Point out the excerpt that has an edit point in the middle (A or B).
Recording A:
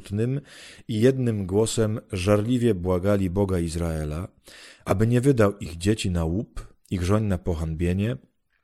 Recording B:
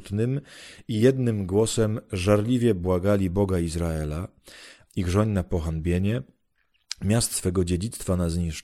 B